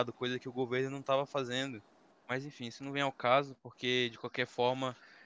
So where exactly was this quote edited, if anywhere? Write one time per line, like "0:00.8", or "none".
0:02.1